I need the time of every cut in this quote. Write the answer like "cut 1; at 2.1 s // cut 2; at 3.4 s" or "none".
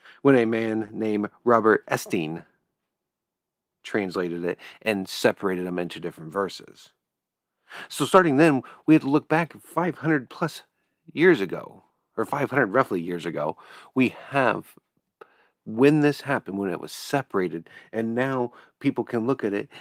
none